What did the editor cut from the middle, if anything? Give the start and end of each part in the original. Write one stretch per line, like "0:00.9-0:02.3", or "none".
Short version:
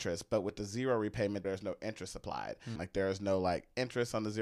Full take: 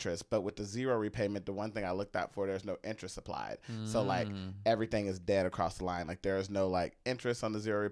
0:01.4-0:02.5
0:03.8-0:06.0

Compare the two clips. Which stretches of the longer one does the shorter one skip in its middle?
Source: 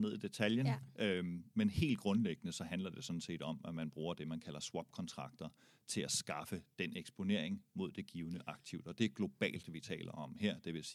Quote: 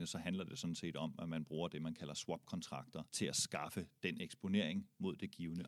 0:05.5-0:05.8

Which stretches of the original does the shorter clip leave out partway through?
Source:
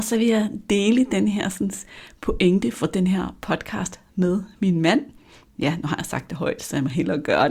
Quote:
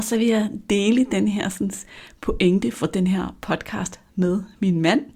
none

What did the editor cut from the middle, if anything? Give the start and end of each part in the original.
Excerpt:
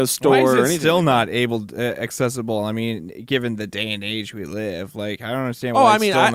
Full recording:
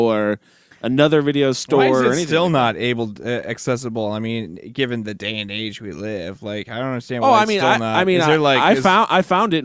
none

